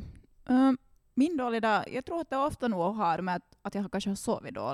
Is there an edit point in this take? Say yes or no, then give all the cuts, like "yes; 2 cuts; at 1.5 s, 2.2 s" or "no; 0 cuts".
no; 0 cuts